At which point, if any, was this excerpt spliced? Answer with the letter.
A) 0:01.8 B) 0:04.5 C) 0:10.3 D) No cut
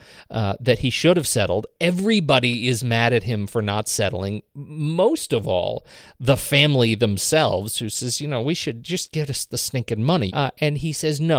C